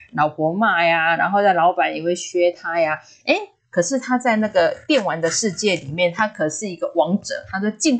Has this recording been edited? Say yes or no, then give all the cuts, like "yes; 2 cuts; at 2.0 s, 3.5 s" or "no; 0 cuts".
no; 0 cuts